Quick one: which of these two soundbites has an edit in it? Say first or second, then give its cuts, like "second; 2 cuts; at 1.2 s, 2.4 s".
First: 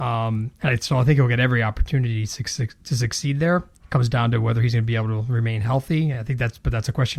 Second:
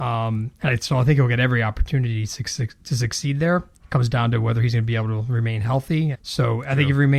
second; 1 cut; at 6.1 s